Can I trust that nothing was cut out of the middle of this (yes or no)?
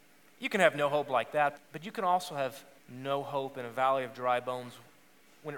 no